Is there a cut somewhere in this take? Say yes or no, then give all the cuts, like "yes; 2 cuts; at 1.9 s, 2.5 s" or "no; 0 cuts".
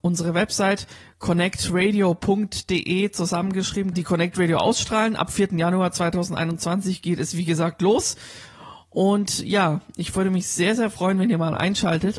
yes; 1 cut; at 3.9 s